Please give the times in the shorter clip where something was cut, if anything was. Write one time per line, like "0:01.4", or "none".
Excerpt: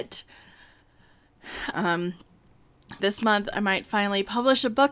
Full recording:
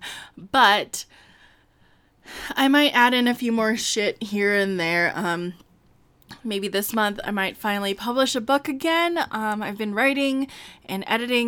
0:01.7
0:03.0